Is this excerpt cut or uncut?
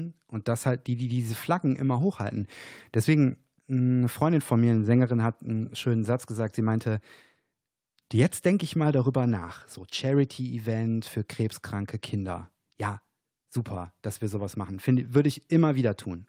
uncut